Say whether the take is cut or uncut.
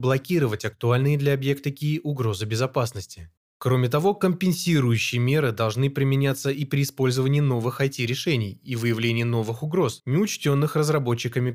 uncut